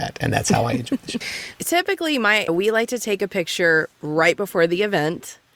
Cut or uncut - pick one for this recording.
cut